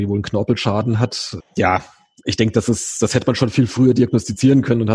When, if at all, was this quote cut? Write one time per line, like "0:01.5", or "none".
0:01.4

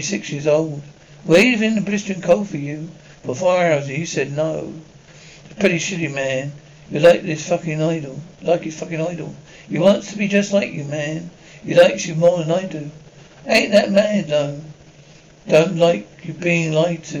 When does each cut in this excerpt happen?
none

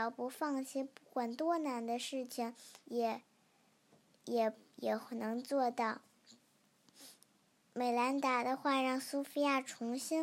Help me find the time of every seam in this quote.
0:02.8

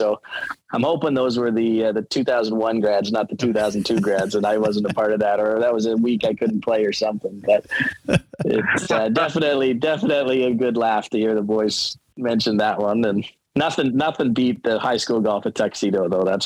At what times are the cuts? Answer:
none

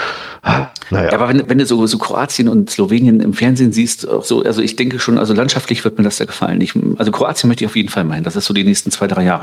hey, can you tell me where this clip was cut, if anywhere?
0:01.4

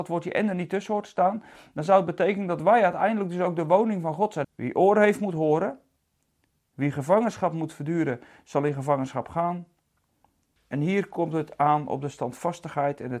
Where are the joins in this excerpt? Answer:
0:04.4
0:10.6

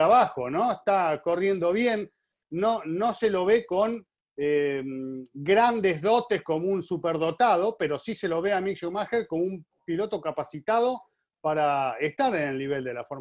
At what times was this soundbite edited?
none

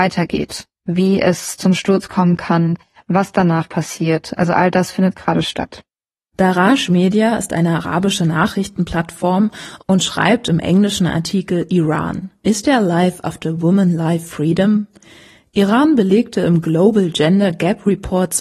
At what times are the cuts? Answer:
none

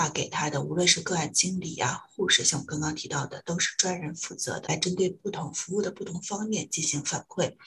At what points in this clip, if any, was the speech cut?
0:04.6

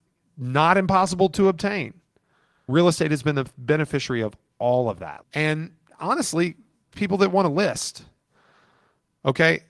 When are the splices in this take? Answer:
0:02.7
0:05.2

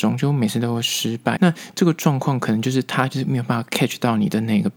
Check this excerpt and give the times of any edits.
0:01.4

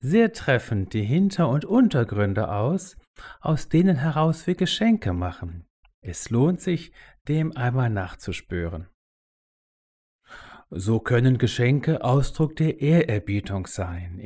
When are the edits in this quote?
none

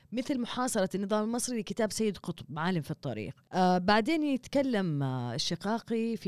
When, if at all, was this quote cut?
0:03.5

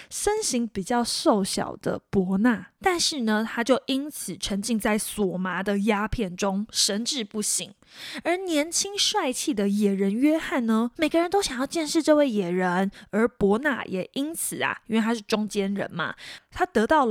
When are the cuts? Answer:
0:02.8
0:10.9

